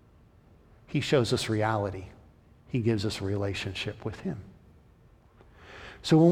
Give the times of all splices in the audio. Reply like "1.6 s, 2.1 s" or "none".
2.6 s